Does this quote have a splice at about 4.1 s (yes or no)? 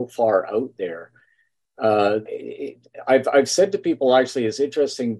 no